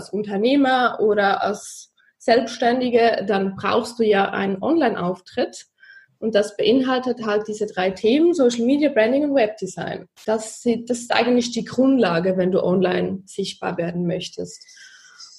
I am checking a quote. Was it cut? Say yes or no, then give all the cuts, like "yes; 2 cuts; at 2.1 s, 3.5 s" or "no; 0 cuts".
no; 0 cuts